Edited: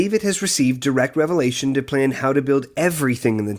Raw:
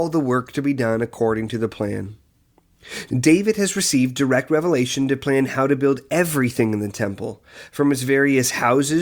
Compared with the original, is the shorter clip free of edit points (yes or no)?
yes